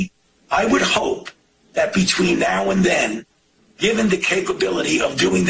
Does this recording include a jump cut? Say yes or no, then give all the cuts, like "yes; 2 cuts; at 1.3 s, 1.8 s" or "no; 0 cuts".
no; 0 cuts